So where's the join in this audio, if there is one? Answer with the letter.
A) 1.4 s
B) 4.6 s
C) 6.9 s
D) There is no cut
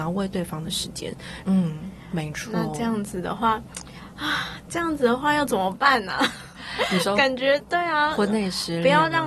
A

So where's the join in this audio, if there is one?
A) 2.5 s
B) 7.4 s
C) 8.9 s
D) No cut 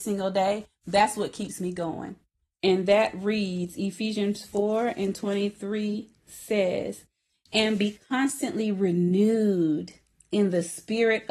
A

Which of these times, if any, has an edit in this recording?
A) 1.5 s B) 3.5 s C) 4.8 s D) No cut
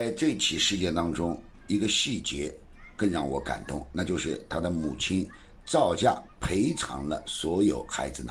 D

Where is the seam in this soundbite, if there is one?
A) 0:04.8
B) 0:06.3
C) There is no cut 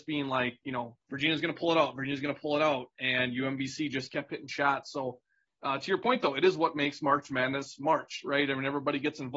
C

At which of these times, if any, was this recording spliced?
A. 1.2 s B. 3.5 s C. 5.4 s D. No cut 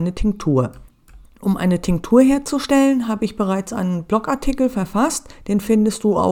D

